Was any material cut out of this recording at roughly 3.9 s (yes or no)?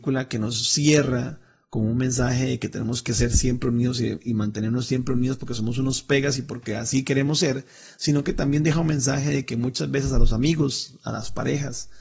no